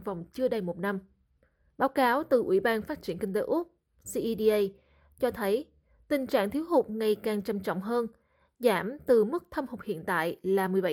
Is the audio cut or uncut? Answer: uncut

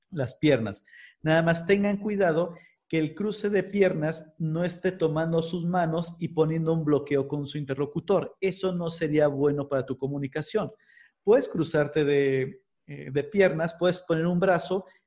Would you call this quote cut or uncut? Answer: uncut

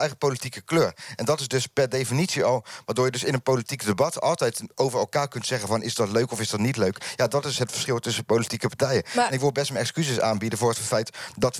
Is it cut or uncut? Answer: uncut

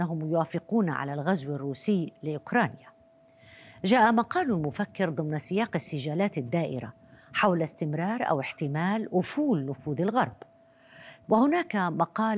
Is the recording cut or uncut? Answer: cut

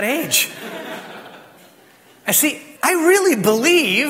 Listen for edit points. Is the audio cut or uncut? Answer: cut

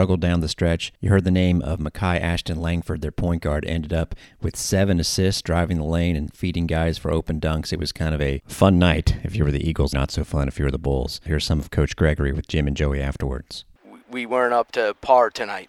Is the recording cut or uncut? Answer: cut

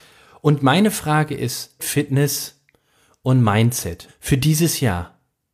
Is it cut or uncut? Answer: cut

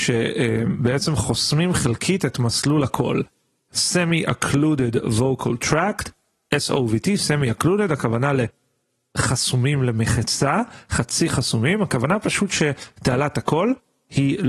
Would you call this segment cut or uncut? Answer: uncut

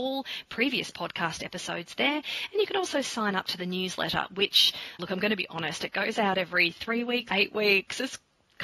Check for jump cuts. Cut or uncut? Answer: cut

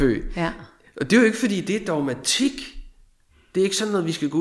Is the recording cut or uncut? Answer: uncut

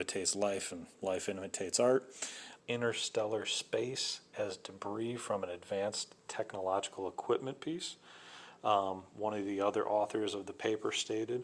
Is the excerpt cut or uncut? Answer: cut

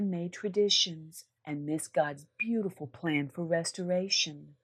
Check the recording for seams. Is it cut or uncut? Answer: cut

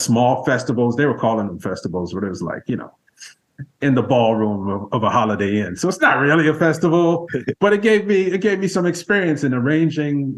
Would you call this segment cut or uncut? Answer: uncut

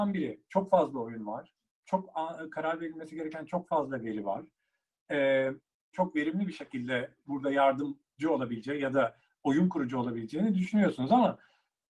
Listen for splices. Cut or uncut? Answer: cut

